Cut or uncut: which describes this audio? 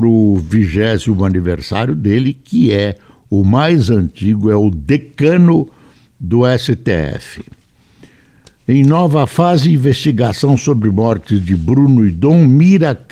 uncut